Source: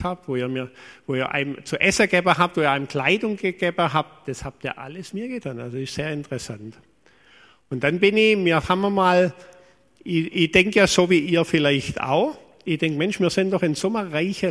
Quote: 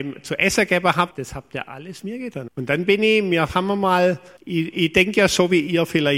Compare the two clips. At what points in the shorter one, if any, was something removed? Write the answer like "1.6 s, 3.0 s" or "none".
1.1 s, 2.5 s, 4.4 s